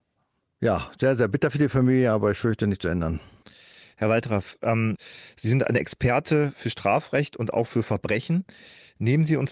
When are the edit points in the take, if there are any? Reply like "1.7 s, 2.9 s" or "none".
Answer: none